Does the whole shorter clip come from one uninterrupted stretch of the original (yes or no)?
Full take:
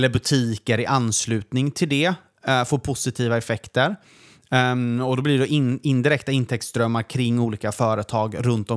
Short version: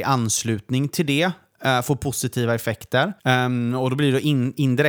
no